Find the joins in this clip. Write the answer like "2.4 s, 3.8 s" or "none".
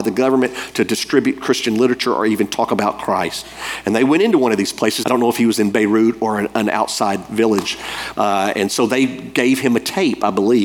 5.0 s, 8.1 s